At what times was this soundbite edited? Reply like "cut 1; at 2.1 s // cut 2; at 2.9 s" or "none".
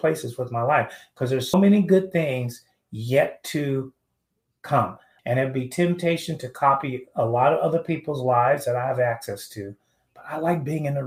cut 1; at 1.5 s // cut 2; at 5.2 s